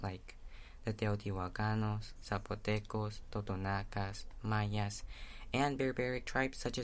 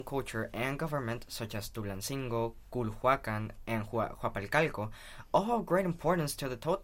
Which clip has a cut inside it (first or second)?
first